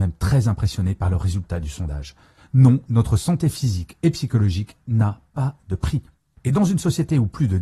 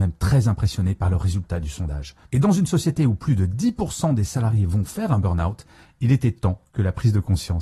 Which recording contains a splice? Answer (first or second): second